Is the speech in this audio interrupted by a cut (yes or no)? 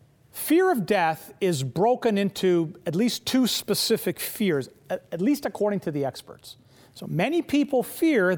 yes